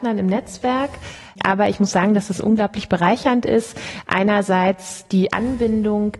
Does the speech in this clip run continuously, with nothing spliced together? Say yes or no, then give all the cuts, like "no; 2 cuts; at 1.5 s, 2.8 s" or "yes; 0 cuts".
yes; 0 cuts